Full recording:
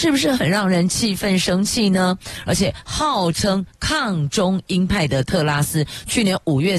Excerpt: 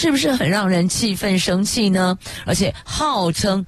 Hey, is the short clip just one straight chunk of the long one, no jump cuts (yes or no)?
yes